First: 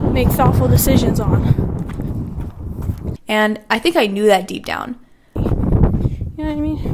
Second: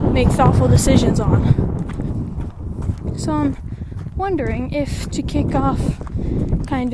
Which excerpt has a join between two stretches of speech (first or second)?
first